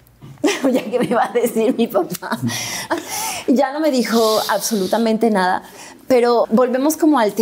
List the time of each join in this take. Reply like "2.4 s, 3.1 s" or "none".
2.9 s, 6.4 s